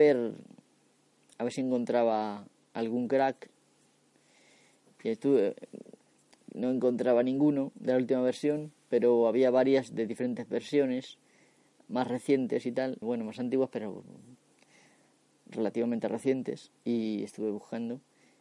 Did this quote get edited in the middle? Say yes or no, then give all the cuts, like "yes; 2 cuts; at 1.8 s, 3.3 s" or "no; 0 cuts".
yes; 1 cut; at 13.0 s